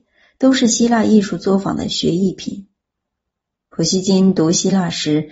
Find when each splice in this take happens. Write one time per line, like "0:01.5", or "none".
none

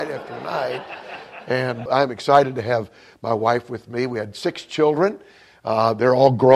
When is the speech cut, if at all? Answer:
0:01.9

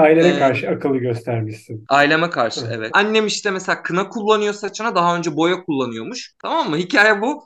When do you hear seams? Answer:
0:02.9
0:06.4

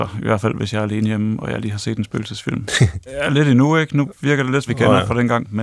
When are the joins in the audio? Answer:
0:03.1
0:04.7

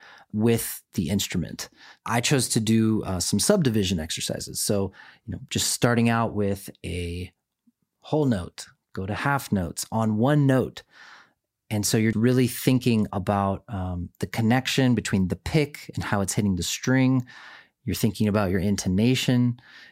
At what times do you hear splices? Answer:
0:12.1

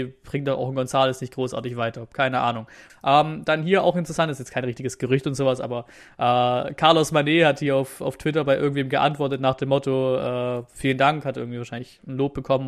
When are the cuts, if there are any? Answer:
0:02.9

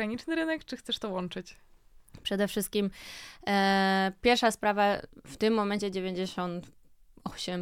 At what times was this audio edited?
none

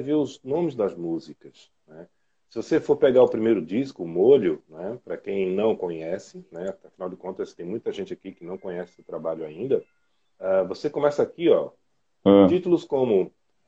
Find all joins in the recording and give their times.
0:10.3

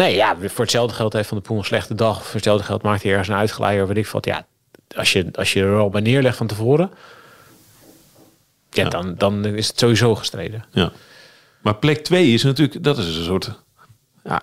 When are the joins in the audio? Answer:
none

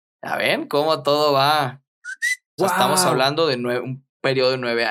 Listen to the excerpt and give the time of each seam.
0:02.6

